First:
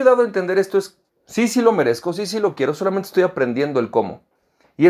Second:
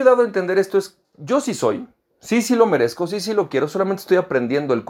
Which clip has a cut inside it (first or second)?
first